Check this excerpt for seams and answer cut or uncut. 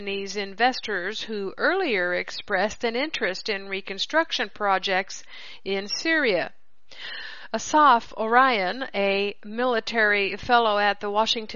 uncut